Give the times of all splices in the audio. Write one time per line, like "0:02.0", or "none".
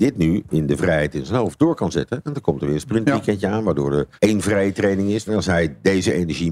0:04.2
0:05.3